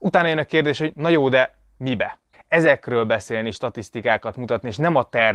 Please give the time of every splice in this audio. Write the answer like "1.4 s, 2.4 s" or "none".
2.3 s